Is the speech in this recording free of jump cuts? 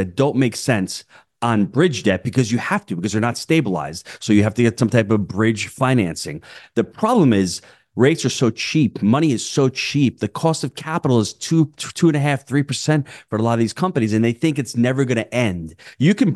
yes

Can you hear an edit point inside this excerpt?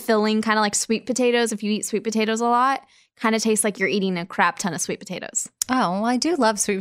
no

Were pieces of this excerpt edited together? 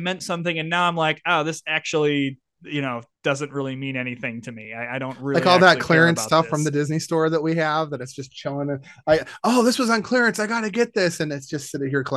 no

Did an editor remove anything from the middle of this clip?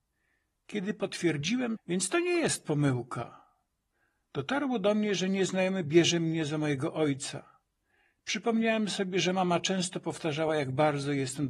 yes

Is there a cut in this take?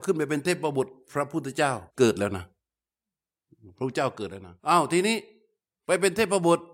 yes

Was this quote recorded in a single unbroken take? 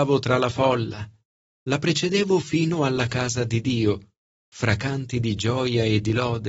yes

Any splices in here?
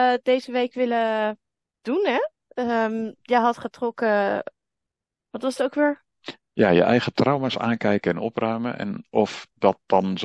no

